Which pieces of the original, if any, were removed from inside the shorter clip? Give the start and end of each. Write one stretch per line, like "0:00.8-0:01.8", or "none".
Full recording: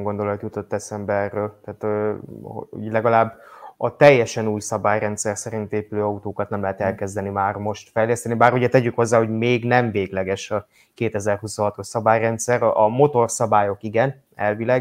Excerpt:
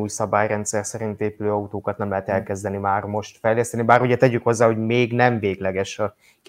none